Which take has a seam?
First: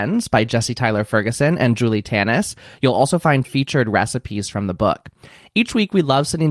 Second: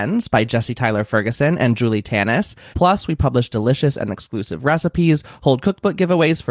second; 1 cut; at 2.7 s

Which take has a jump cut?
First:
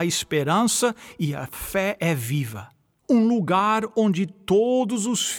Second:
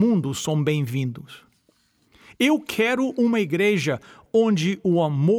first; 1 cut; at 3.0 s

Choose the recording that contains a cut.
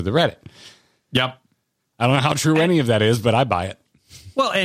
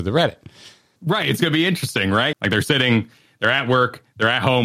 second; 2 cuts; at 1.0 s, 2.3 s

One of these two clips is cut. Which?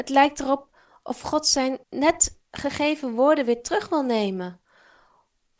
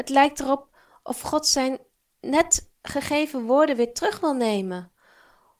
first; 1 cut; at 1.8 s

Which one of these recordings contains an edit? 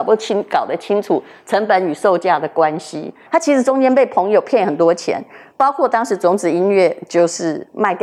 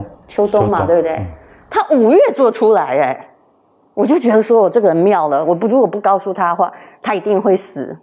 first; 1 cut; at 3.3 s

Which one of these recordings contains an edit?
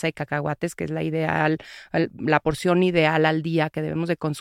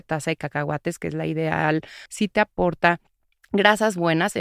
second; 1 cut; at 2.1 s

